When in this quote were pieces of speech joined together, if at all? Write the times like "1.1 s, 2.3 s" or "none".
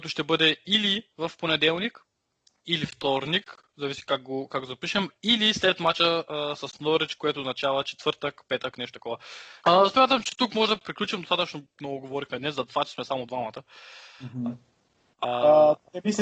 9.6 s